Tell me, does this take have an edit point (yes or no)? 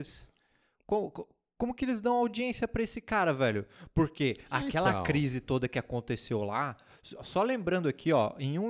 no